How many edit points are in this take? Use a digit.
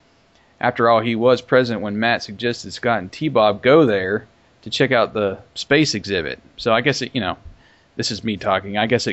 0